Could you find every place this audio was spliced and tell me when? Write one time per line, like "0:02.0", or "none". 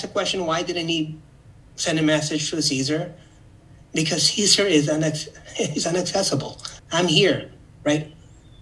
0:06.8